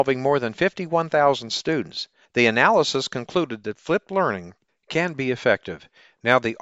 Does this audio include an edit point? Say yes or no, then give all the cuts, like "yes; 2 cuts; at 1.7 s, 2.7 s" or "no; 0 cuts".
yes; 1 cut; at 2.3 s